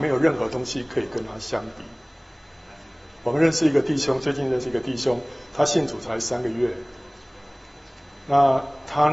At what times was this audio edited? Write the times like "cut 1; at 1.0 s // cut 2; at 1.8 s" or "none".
none

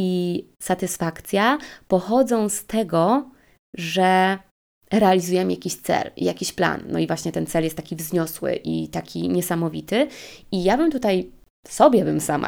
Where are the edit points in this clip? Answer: none

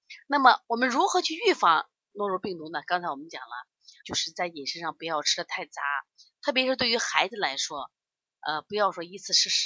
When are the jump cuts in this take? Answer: cut 1; at 4.0 s

